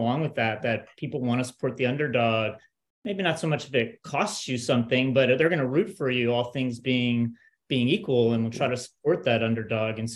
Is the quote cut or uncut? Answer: uncut